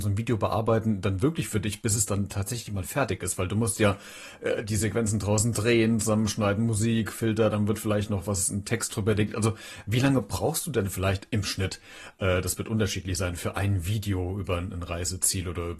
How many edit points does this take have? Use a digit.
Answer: 0